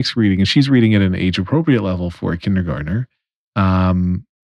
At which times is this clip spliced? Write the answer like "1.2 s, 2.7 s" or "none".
none